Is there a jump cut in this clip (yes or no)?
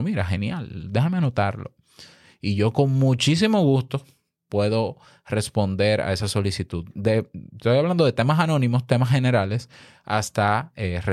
no